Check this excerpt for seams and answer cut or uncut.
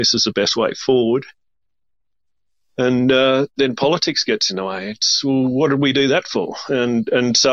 uncut